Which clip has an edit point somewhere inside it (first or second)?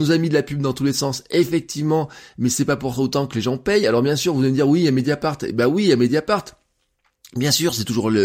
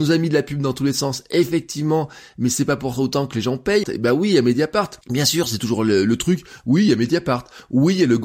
second